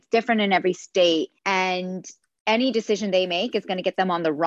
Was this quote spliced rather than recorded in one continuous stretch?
yes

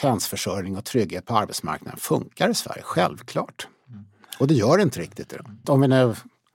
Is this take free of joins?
no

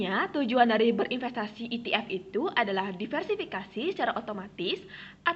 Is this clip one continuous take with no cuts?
yes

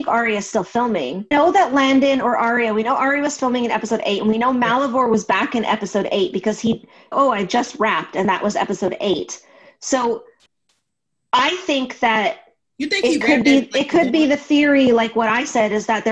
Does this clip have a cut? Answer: yes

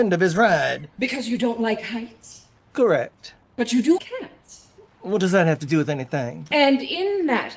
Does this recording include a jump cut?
yes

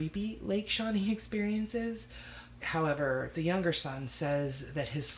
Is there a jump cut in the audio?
yes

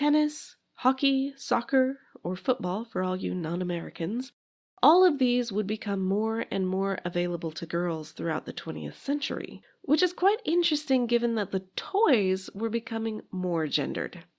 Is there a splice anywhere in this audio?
no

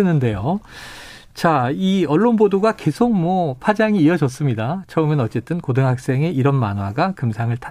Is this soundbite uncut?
yes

